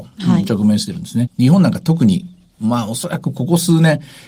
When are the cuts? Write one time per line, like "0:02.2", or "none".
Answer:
0:01.3